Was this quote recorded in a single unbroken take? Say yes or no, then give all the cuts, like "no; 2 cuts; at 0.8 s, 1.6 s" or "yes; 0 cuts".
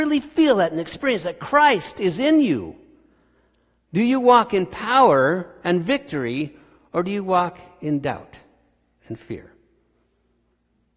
yes; 0 cuts